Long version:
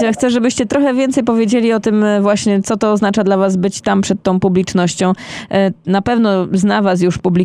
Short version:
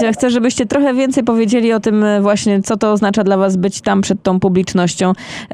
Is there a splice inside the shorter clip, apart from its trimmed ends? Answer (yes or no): no